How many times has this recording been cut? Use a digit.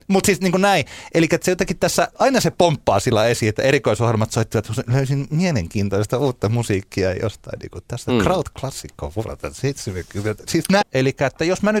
2